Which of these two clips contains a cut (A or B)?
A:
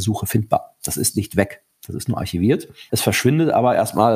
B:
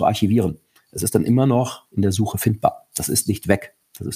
A